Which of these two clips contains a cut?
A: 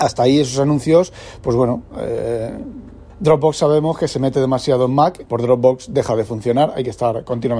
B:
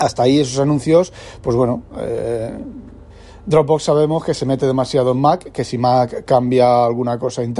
A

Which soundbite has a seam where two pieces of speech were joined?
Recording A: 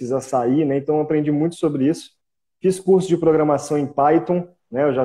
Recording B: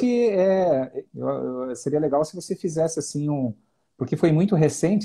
B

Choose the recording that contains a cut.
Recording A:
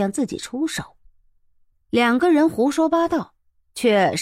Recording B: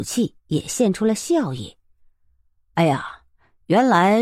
A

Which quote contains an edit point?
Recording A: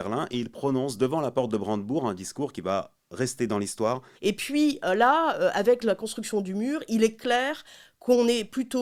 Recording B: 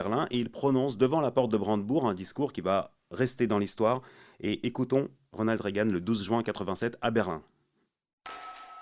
A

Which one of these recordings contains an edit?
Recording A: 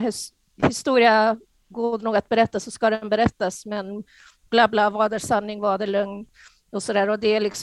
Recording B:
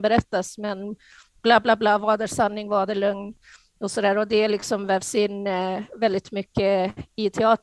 A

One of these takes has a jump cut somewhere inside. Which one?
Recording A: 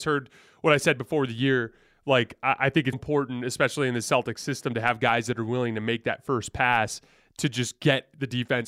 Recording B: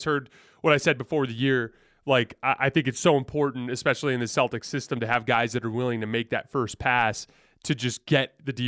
A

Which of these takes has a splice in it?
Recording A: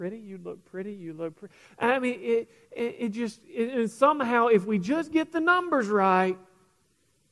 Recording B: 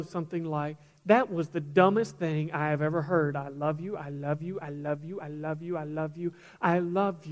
B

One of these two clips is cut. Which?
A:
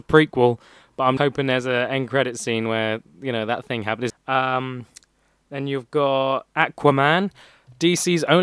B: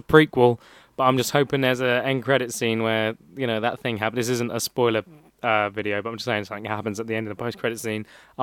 A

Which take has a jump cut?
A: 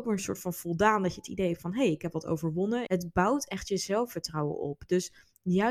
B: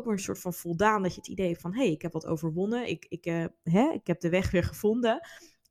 A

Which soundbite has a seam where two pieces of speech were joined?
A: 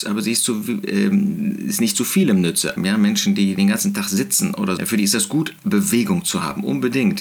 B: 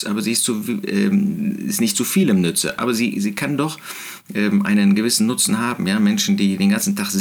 A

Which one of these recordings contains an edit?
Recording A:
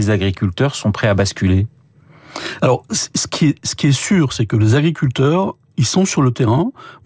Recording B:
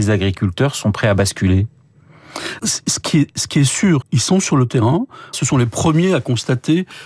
B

